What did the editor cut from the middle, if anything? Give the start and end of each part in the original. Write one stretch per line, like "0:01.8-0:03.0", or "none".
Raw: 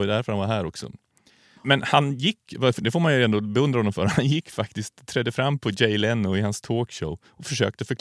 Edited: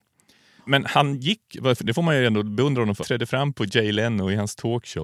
0:04.0-0:05.1